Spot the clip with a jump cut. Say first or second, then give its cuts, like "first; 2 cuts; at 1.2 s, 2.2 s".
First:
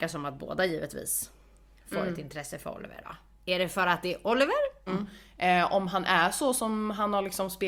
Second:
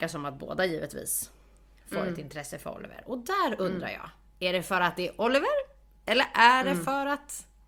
first; 2 cuts; at 3.0 s, 4.9 s